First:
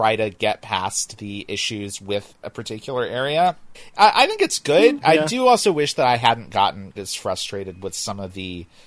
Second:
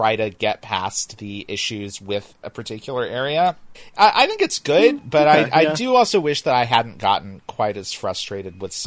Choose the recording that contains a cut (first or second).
first